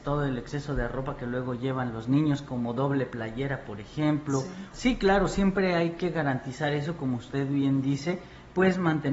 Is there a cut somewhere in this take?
yes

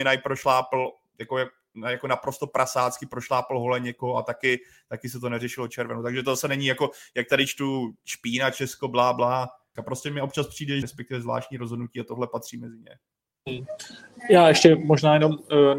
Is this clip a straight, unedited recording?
no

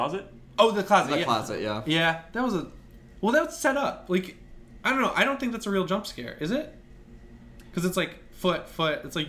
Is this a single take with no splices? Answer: yes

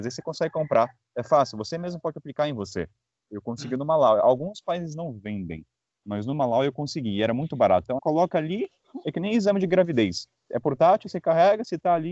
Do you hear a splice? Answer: yes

